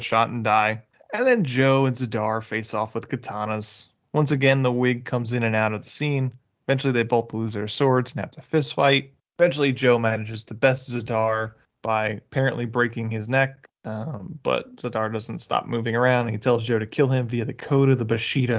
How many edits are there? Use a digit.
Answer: 0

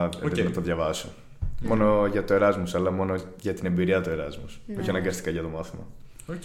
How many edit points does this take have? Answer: 0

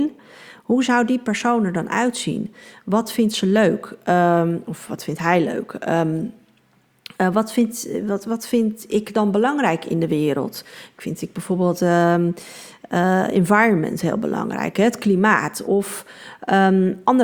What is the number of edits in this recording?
1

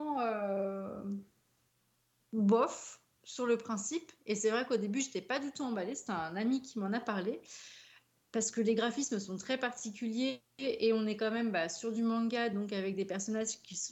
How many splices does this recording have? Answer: 0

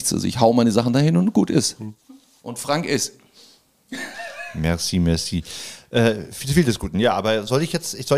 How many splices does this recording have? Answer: 0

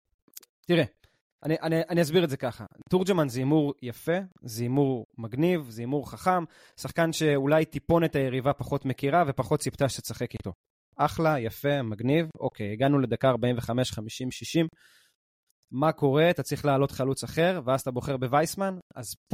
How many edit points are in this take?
0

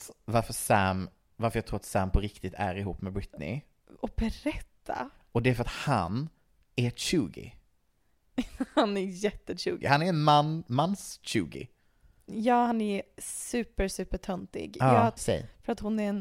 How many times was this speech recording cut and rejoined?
2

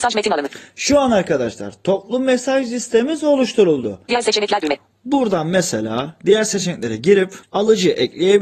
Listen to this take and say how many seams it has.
2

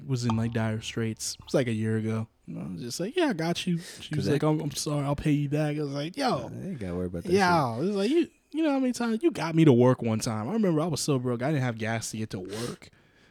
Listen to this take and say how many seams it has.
0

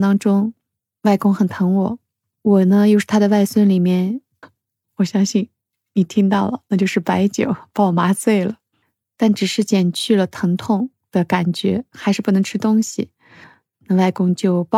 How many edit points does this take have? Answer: 1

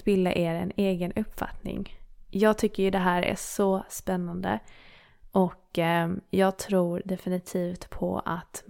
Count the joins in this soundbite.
0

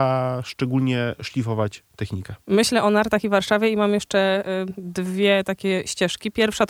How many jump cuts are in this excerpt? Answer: 1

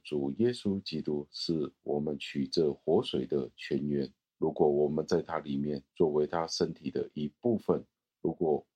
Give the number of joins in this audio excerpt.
0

